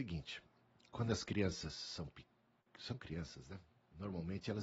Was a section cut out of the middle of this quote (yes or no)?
no